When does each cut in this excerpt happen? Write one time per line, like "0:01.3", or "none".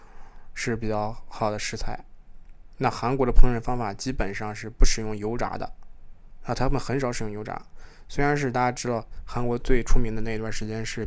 none